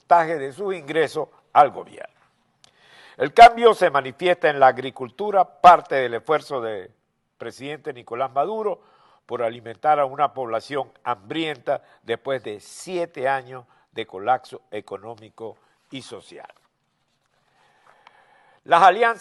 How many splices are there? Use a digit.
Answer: 0